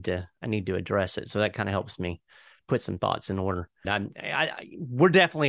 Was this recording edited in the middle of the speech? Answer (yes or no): yes